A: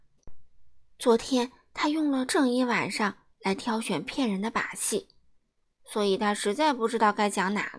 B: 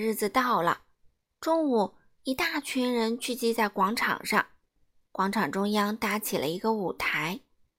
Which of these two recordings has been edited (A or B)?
A